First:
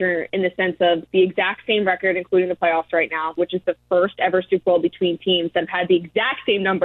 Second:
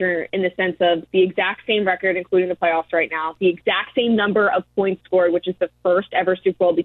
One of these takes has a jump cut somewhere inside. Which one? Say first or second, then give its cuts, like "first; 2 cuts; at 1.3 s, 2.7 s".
first; 1 cut; at 3.4 s